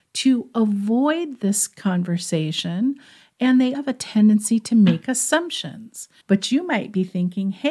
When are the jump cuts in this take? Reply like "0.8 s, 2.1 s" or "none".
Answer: 3.7 s, 6.2 s